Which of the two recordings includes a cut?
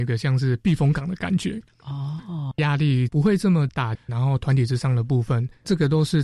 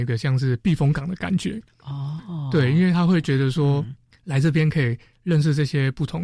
first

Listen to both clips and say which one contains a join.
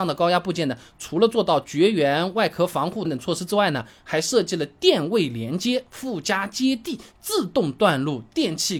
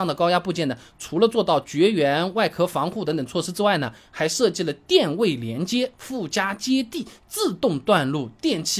first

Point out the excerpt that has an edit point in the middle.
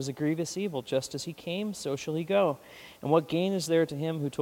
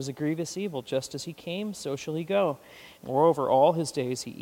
second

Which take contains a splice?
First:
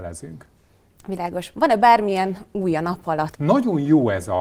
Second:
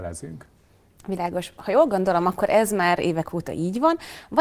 first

